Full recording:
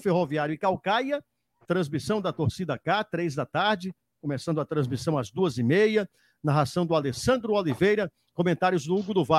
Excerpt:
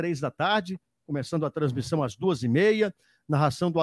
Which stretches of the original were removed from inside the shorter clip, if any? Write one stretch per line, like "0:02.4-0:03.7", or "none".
none